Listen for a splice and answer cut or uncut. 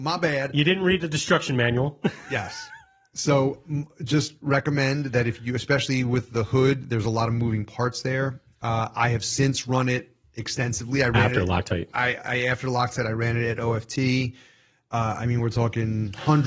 uncut